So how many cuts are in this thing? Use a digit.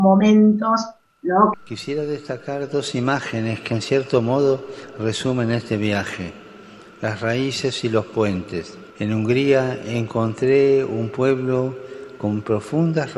2